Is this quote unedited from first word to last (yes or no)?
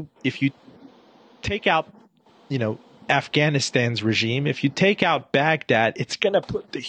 yes